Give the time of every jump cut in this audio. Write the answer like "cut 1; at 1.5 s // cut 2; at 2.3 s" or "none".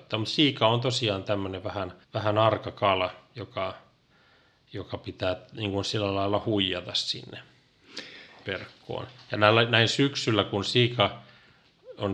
cut 1; at 2.0 s